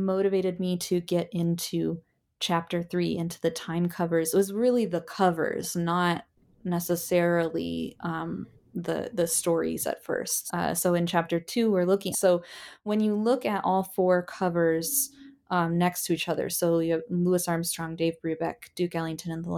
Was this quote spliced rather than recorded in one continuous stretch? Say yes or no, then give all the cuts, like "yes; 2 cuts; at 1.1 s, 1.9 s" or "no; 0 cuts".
yes; 2 cuts; at 10.5 s, 12.1 s